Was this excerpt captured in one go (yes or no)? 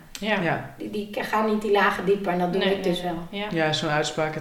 yes